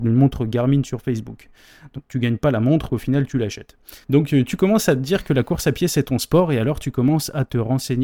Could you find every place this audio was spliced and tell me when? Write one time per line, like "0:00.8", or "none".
0:02.9
0:04.0